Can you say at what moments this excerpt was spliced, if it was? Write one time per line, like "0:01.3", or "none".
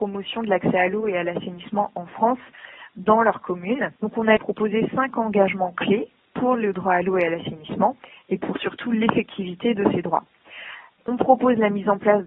0:04.0